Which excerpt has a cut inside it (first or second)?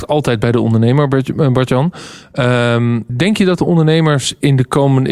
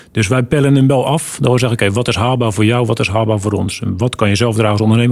first